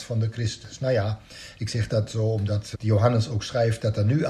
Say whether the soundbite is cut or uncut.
cut